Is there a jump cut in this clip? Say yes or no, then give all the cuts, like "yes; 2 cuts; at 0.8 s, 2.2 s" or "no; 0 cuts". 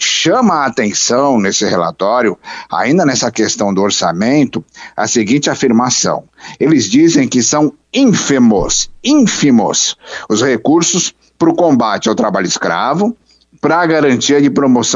no; 0 cuts